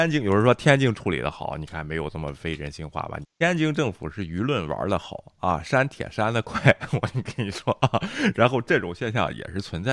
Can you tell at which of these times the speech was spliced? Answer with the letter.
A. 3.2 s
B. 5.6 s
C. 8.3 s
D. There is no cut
A